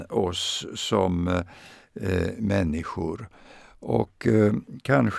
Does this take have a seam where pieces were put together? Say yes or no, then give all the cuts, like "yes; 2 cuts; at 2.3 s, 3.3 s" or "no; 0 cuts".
no; 0 cuts